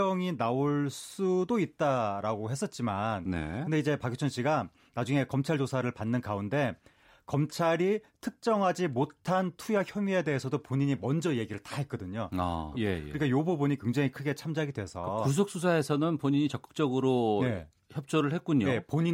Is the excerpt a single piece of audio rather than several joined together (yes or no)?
no